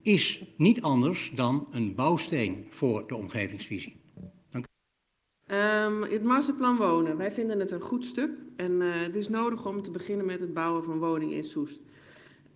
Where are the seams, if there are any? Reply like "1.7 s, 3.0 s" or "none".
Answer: 5.5 s